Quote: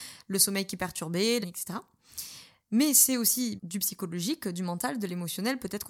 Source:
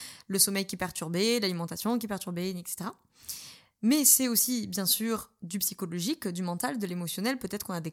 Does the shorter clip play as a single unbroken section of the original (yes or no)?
no